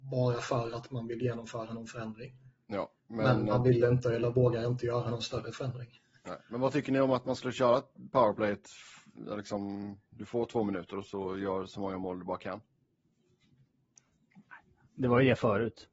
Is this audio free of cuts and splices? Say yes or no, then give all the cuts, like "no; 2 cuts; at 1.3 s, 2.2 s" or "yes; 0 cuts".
no; 1 cut; at 3.0 s